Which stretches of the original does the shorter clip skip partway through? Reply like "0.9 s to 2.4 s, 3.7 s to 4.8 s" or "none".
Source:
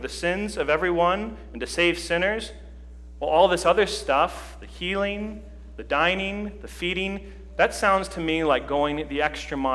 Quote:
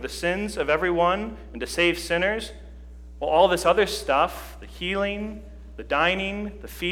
none